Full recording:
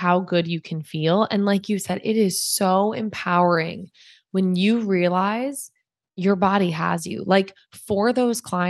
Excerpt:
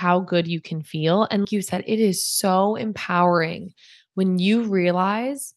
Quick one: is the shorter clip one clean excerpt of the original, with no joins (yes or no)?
no